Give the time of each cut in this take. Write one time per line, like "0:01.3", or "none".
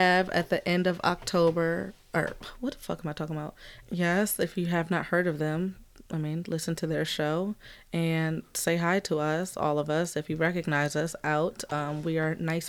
0:03.8